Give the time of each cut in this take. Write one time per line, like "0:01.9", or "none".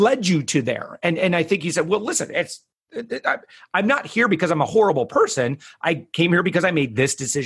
none